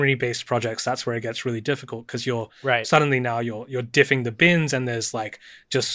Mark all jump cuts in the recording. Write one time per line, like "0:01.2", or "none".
none